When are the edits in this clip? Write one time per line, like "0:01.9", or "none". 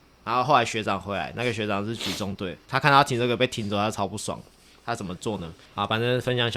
0:05.7